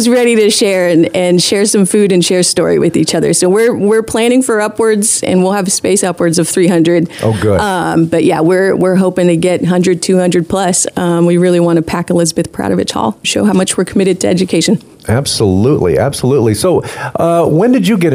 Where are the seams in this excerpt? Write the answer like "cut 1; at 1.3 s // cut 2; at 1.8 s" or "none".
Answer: cut 1; at 13.2 s